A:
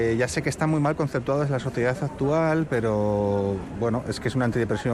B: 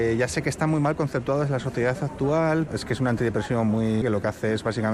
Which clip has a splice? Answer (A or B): B